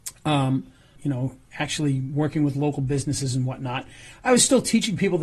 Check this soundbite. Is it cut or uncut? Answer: cut